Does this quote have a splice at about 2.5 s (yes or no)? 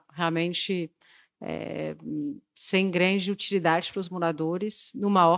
no